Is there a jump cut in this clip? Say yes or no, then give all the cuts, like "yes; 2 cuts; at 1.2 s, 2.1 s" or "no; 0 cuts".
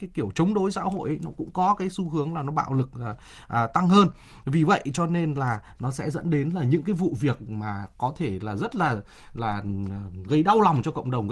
no; 0 cuts